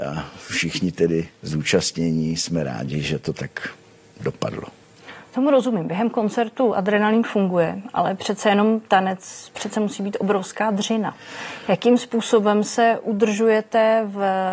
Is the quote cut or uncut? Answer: uncut